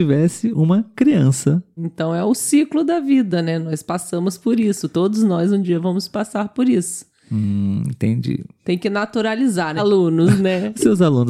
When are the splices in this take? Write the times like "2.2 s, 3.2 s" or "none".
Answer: 1.8 s, 9.8 s